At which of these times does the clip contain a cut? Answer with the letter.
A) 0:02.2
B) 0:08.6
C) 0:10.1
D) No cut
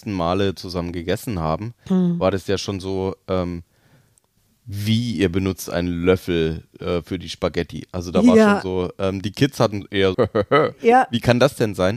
C